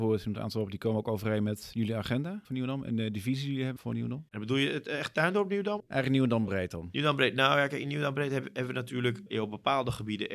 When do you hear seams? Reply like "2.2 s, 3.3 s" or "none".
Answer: none